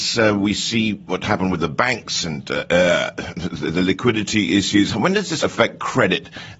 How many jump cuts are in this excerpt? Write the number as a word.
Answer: one